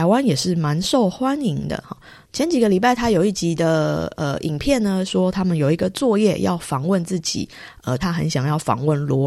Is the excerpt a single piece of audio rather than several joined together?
no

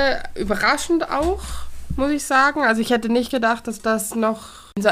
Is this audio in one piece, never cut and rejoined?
yes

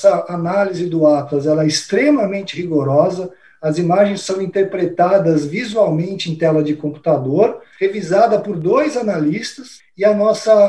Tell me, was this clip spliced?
no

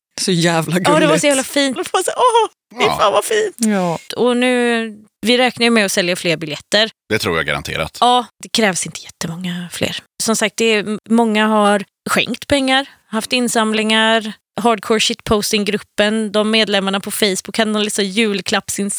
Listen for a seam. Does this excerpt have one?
yes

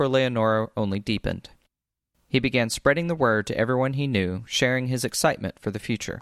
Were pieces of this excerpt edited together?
no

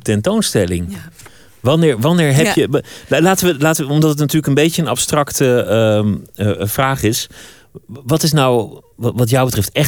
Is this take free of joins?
yes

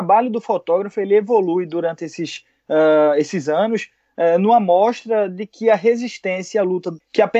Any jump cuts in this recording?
no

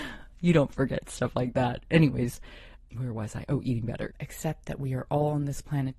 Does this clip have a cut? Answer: yes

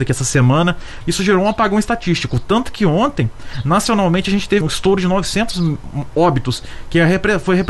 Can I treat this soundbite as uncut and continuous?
no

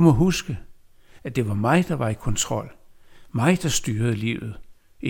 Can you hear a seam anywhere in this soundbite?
yes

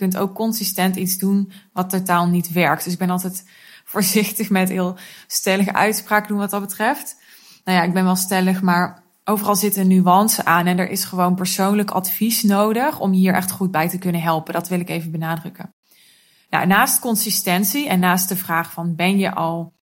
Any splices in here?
no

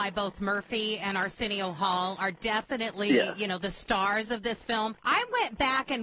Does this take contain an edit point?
no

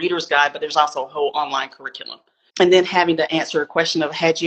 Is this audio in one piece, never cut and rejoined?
no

